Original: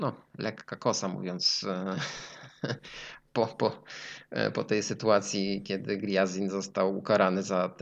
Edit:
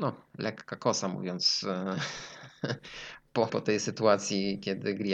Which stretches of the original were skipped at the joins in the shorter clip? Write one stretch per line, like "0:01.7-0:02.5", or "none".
0:03.5-0:04.5